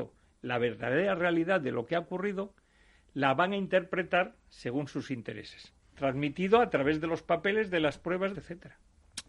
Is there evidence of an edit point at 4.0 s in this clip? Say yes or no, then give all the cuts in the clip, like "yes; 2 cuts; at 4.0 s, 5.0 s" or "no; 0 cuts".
no; 2 cuts; at 5.8 s, 8.3 s